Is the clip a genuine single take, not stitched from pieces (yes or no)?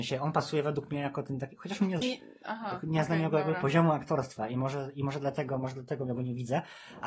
no